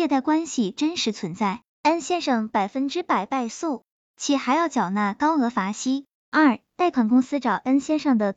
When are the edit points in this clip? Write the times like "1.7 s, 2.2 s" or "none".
none